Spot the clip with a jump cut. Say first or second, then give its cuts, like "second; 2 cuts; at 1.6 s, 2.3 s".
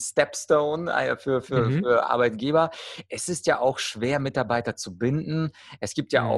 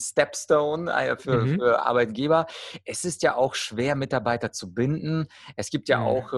second; 1 cut; at 1.2 s